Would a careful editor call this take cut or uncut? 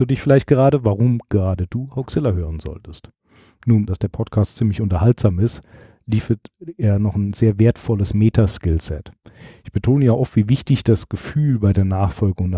cut